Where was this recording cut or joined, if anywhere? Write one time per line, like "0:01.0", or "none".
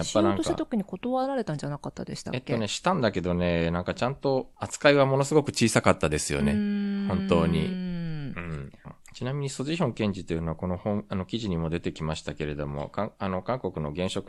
0:08.8